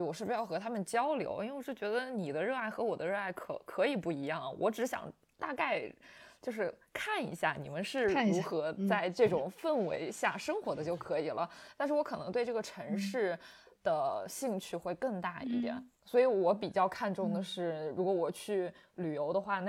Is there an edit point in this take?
yes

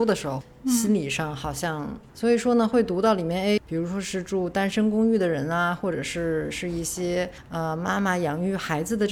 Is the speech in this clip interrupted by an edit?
yes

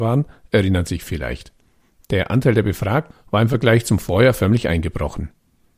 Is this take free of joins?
no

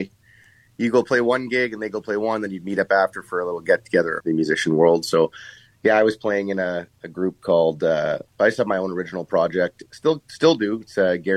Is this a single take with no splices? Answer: no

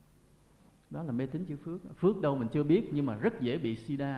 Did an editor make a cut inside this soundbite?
no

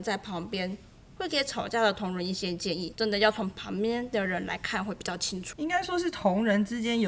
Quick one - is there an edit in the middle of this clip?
no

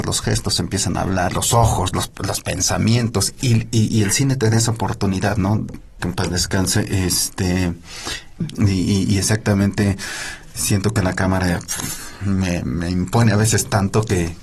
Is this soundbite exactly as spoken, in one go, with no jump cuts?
no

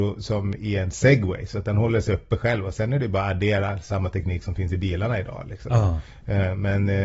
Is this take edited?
no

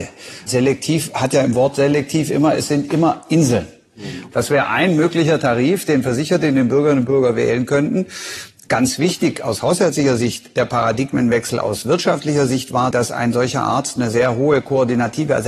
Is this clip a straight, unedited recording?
no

